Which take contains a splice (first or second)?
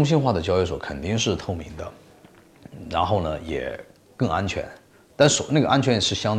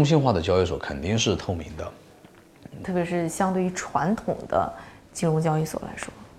second